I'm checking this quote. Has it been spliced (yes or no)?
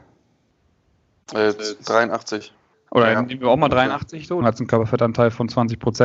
yes